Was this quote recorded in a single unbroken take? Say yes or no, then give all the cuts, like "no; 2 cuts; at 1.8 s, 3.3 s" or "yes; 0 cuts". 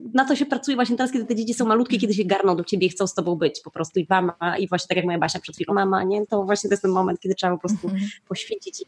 no; 1 cut; at 5.7 s